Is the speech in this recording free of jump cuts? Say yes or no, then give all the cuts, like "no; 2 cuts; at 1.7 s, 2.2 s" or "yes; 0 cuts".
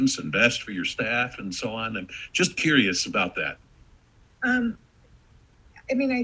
yes; 0 cuts